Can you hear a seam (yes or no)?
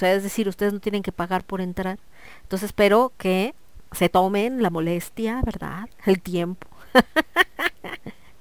yes